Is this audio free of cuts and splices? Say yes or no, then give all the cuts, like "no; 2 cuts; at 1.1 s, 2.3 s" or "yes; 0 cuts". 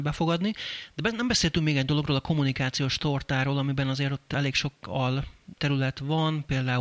yes; 0 cuts